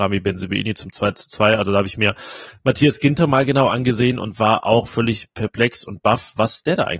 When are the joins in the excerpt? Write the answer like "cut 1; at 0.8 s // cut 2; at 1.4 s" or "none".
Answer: none